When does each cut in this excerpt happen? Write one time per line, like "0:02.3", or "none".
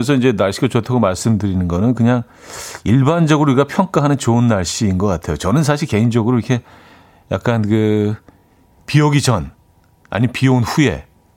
none